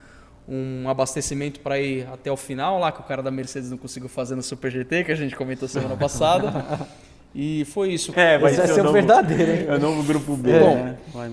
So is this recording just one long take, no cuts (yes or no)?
no